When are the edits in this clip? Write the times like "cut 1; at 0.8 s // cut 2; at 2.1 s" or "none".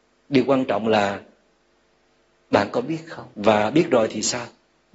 cut 1; at 3.3 s